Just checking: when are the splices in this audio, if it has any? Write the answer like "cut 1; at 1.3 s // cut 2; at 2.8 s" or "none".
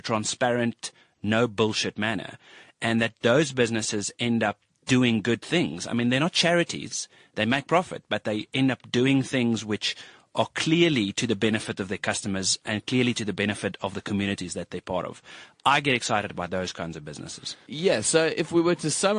none